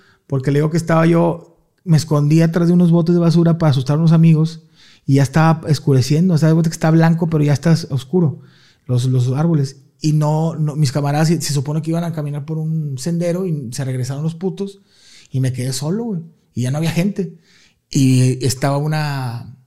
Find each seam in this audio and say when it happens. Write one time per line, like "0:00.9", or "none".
none